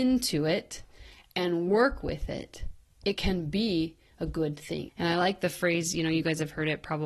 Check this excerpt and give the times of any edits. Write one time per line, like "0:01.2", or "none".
0:04.9